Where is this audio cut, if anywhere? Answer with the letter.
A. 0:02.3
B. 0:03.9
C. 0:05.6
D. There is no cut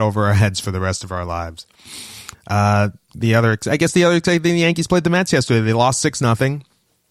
A